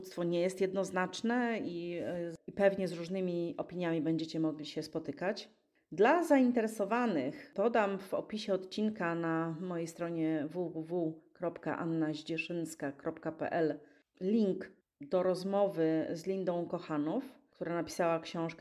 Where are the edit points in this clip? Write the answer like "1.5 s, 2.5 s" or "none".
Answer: none